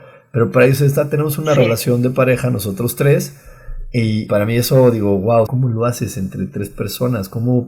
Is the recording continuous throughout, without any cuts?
no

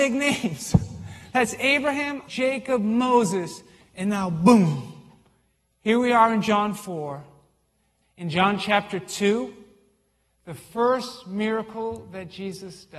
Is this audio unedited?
no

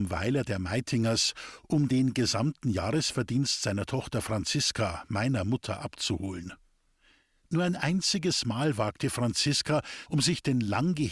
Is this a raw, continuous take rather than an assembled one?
no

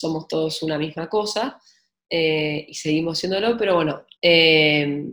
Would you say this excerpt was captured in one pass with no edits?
no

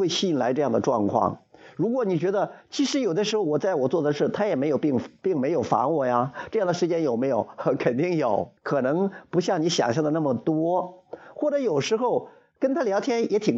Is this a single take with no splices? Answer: no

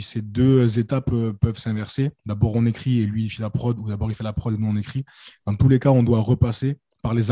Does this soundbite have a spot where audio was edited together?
no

